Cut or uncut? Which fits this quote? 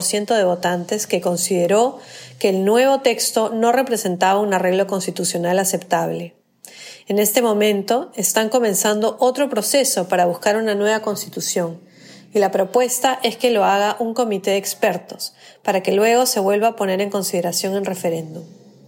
uncut